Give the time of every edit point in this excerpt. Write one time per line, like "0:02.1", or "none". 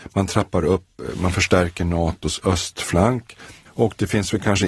0:03.7